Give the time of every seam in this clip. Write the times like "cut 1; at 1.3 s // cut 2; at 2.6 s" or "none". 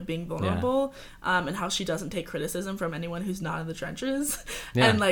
none